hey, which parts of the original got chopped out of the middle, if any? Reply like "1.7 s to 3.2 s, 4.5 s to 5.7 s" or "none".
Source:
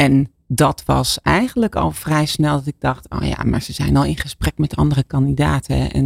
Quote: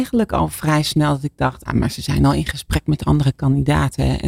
3.1 s to 3.4 s